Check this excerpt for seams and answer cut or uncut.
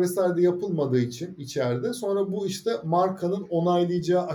uncut